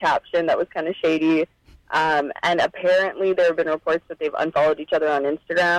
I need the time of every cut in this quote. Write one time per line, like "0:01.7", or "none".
none